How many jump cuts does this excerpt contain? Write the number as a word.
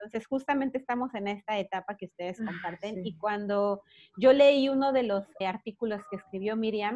one